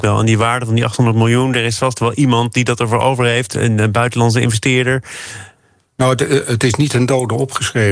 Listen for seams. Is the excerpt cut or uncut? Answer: uncut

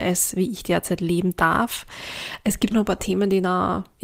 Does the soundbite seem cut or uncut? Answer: cut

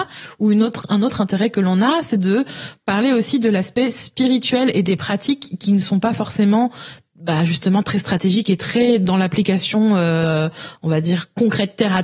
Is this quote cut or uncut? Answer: uncut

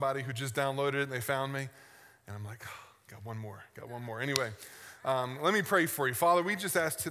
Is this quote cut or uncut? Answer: uncut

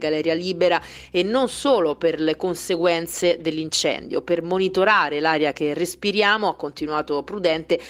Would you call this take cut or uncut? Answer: uncut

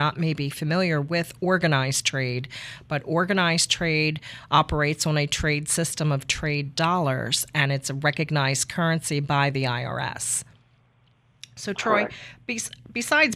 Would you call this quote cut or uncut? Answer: uncut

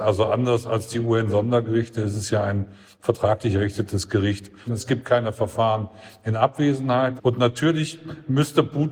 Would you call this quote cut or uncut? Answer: cut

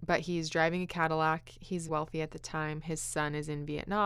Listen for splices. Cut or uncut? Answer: cut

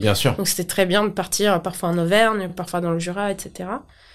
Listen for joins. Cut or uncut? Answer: uncut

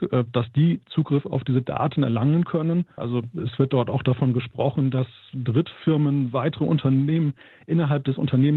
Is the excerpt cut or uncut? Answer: cut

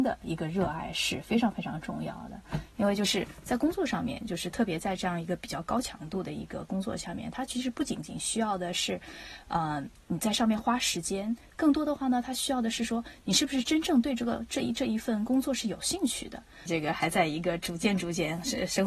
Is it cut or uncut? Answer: cut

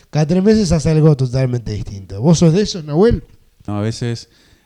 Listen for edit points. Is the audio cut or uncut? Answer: cut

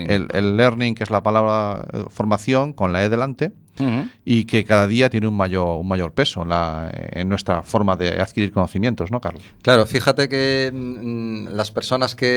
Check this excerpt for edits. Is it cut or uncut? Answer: cut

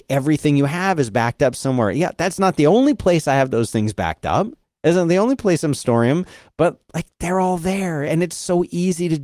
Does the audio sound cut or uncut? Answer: uncut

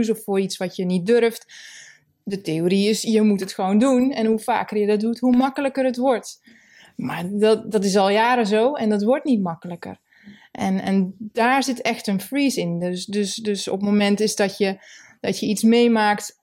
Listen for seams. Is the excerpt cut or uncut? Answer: uncut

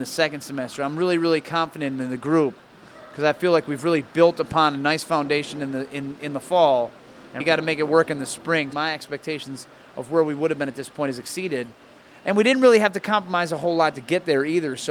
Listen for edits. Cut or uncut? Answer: cut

